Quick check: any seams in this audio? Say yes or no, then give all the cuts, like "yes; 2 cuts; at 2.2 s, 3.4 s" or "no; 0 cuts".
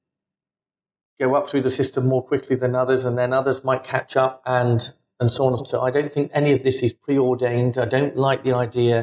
yes; 1 cut; at 5.6 s